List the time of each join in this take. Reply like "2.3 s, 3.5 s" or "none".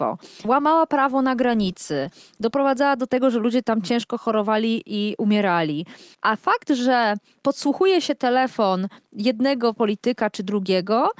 none